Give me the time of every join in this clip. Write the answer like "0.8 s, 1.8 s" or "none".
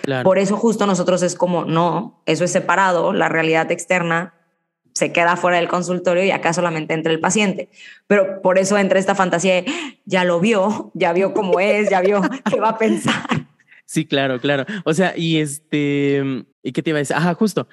16.5 s

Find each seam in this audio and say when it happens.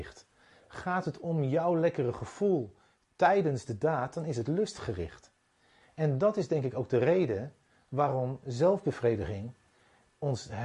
5.8 s

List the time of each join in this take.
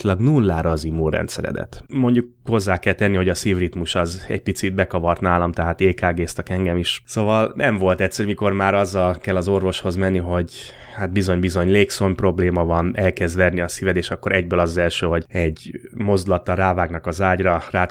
1.9 s

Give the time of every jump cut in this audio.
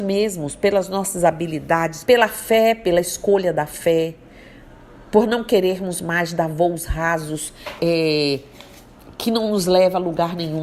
2.0 s, 7.8 s

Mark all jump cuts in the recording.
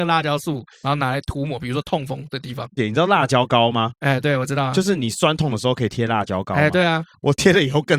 2.8 s

